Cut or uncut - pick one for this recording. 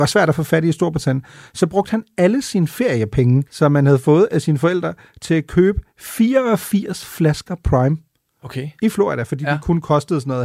cut